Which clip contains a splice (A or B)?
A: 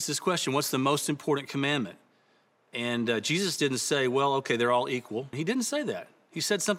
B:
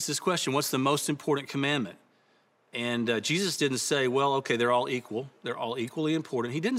A